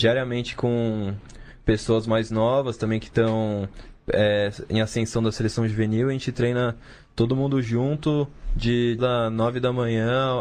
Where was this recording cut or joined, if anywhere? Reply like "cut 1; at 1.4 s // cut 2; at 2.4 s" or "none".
cut 1; at 9.0 s